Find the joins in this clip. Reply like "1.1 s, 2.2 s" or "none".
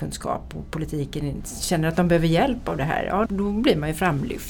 3.3 s